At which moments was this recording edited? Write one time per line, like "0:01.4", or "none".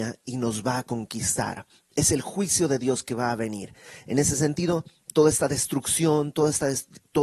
none

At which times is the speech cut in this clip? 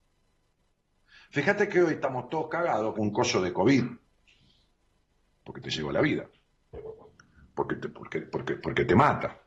0:02.9
0:05.3

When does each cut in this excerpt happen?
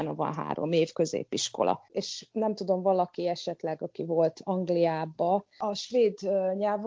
0:01.9

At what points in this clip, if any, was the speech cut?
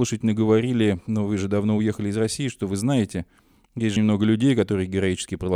0:04.0

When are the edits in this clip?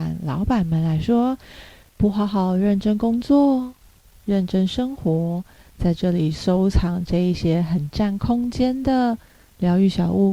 0:02.0

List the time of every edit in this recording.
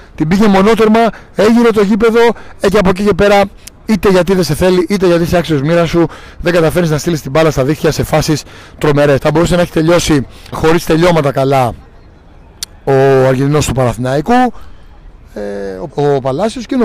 0:09.2
0:10.5
0:15.9

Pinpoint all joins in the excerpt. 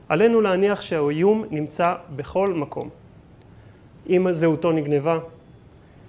0:04.0

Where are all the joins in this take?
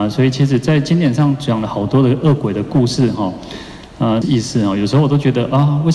0:04.2

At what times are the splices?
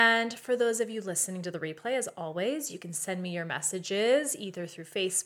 none

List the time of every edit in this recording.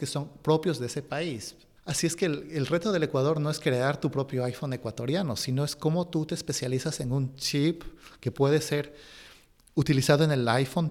0:01.8

